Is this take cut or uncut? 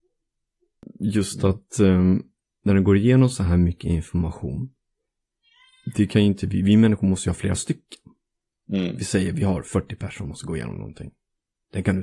uncut